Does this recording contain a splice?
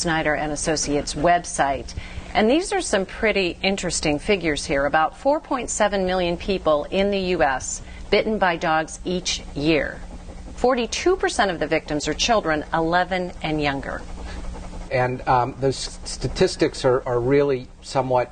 yes; 2 cuts; at 14.9 s, 17.0 s

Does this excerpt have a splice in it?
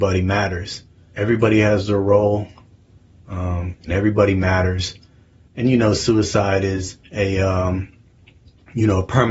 yes; 3 cuts; at 3.7 s, 5.5 s, 7.1 s

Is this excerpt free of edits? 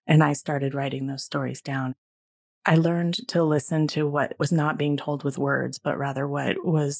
yes; 0 cuts

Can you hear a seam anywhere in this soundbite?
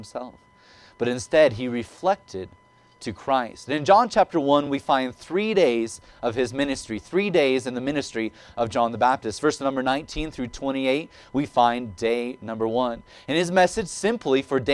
no; 0 cuts

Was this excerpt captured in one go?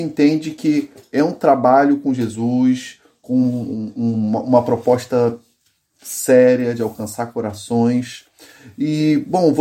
yes; 0 cuts

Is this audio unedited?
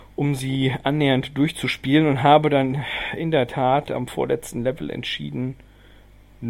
yes; 0 cuts

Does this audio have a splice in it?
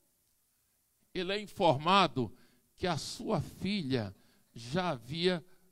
yes; 1 cut; at 1.0 s

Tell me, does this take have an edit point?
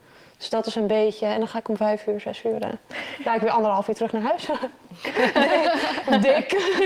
yes; 1 cut; at 5.0 s

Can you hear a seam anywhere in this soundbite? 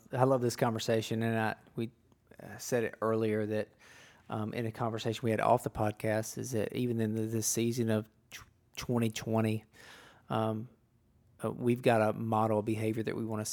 no; 0 cuts

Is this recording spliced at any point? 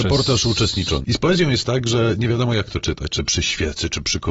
yes; 1 cut; at 1.0 s

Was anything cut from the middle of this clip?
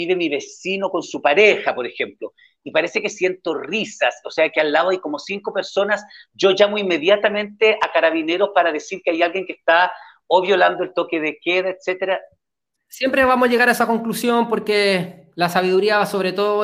yes; 1 cut; at 12.8 s

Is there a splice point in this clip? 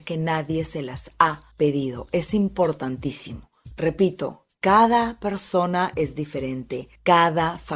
no; 0 cuts

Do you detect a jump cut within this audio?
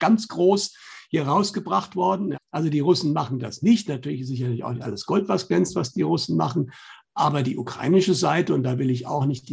yes; 1 cut; at 2.3 s

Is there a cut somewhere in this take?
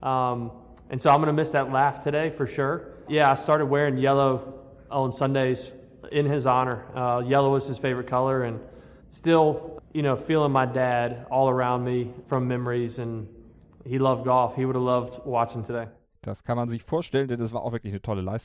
yes; 2 cuts; at 9.8 s, 12.2 s

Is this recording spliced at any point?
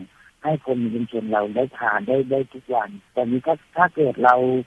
yes; 1 cut; at 3.1 s

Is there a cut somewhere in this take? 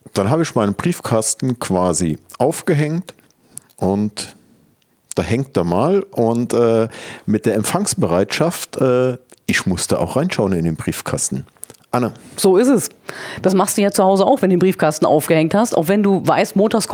no; 0 cuts

